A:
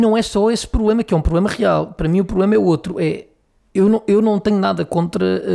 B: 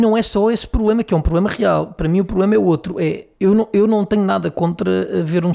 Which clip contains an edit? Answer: B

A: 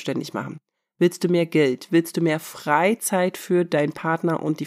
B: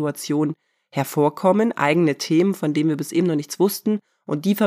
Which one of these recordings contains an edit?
A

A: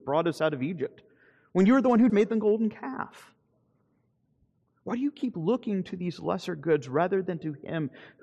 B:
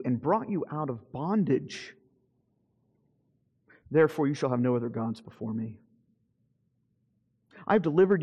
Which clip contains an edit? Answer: A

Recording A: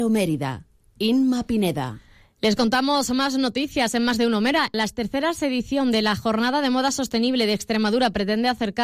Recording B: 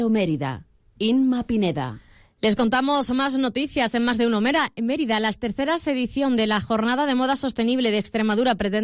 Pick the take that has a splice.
A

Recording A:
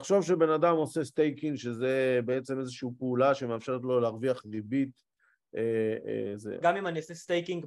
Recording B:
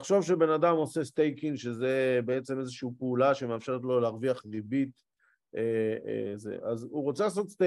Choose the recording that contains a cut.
A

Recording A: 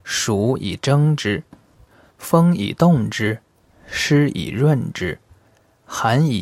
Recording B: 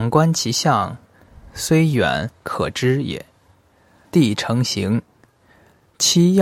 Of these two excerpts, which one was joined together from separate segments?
B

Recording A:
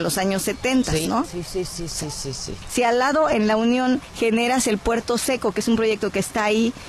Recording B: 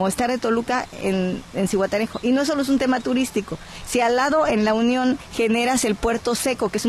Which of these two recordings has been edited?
A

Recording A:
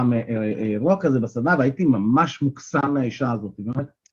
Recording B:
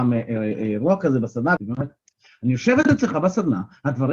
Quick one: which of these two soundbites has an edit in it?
B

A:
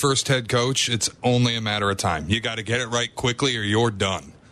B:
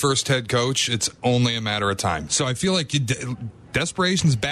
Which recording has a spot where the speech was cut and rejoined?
B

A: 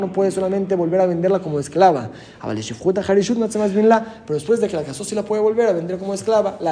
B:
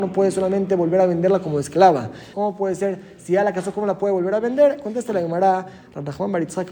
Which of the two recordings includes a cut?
B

